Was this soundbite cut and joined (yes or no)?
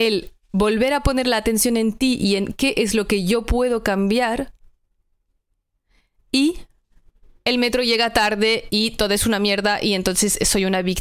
no